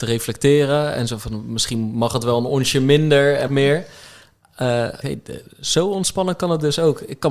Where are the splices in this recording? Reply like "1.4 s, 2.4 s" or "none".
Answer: 3.5 s, 5.0 s

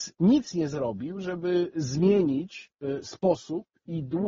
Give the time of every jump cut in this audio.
none

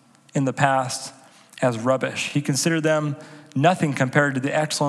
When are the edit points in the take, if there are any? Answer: none

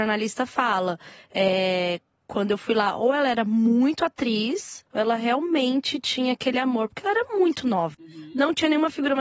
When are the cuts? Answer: 4.9 s, 7.9 s

